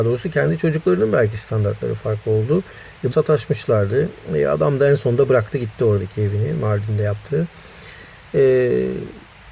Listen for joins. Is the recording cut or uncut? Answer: cut